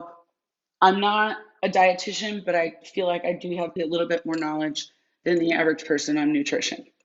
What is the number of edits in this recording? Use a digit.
1